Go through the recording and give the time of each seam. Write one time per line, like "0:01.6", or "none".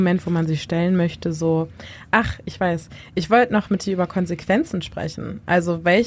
none